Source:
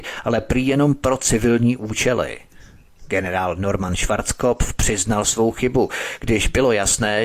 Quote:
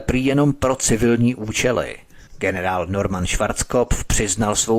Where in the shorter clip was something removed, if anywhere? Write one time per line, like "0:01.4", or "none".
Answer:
0:02.3